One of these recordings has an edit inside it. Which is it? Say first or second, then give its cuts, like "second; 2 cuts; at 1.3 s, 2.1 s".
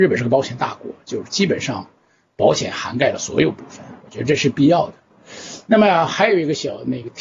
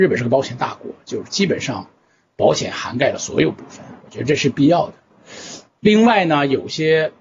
second; 1 cut; at 5.7 s